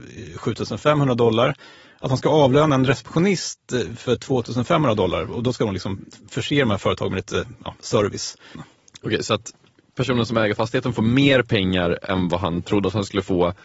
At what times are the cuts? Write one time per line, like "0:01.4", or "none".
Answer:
0:08.5